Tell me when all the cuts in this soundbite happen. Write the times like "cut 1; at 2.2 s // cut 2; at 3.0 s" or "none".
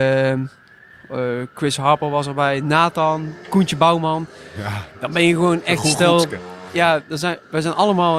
none

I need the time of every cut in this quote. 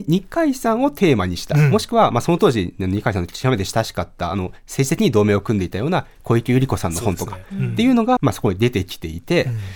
cut 1; at 8.2 s

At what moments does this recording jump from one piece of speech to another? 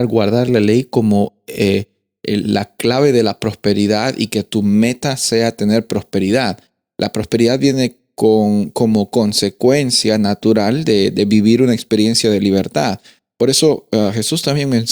none

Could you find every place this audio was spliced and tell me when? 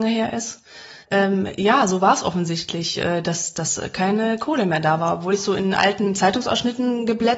cut 1; at 1.0 s

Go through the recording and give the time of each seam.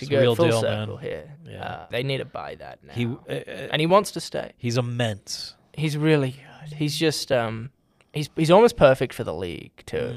cut 1; at 1.9 s

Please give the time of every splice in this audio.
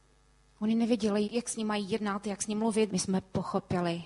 cut 1; at 1.2 s // cut 2; at 2.9 s

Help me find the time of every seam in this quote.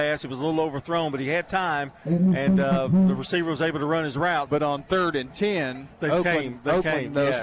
cut 1; at 4.5 s

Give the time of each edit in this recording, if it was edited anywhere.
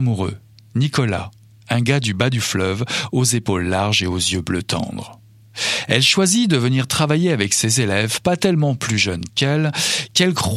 none

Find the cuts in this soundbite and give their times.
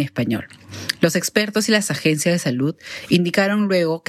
none

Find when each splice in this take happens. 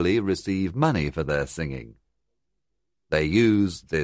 none

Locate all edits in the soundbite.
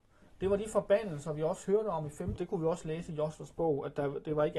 cut 1; at 2.4 s

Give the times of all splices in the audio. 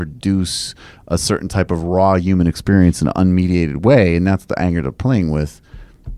none

